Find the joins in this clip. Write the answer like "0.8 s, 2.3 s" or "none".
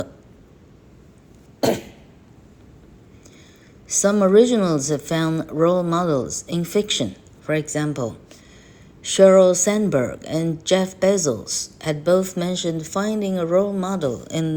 none